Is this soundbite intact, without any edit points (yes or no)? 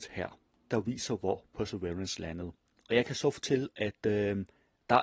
yes